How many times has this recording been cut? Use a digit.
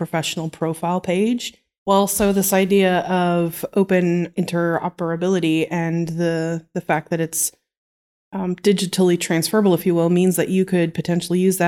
1